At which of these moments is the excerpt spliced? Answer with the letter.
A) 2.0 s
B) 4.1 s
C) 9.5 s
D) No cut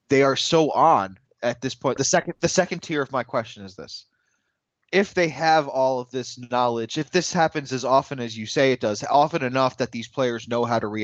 A